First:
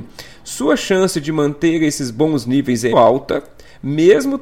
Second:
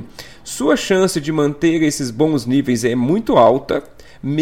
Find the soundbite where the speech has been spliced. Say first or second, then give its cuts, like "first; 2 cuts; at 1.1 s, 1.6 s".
first; 1 cut; at 2.9 s